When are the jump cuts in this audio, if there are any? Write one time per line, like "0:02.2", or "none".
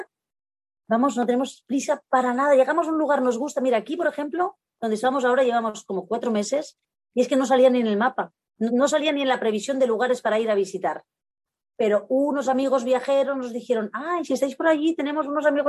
0:08.7